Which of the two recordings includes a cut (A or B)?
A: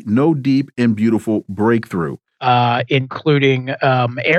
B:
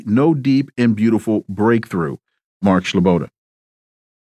A